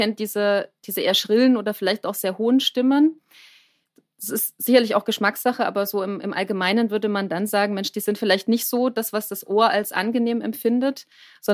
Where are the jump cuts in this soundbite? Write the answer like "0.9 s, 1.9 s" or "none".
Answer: none

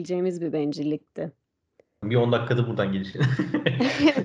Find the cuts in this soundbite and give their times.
2.0 s

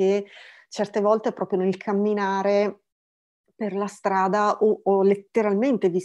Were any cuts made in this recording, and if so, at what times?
none

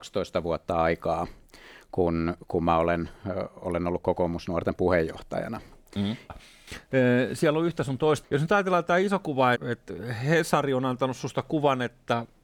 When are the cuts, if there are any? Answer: 6.3 s, 8.2 s, 9.5 s

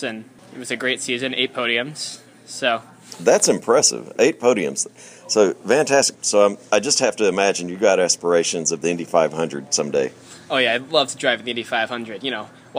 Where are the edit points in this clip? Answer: 6.1 s

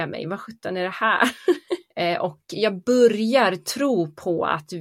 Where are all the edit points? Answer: 1.9 s

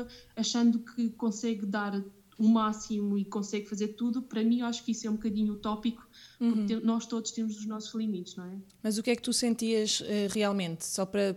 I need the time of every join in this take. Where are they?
none

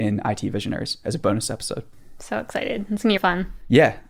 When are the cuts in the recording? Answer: 3.2 s

